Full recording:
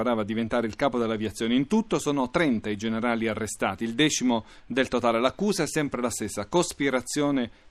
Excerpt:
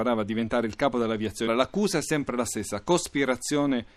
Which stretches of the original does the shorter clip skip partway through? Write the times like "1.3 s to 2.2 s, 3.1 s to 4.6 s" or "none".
1.5 s to 5.1 s